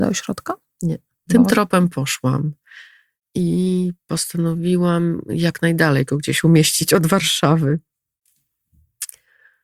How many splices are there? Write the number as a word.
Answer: one